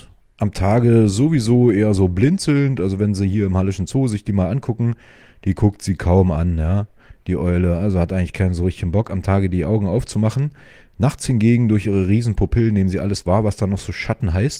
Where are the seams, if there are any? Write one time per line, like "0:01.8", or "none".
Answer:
none